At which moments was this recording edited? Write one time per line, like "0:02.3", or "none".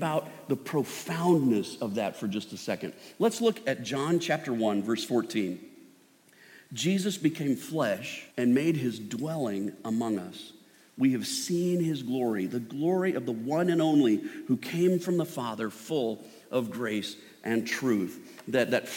0:08.3